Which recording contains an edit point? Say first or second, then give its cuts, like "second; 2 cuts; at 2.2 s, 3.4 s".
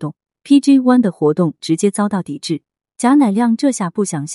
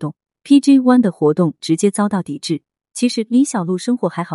first; 1 cut; at 2.9 s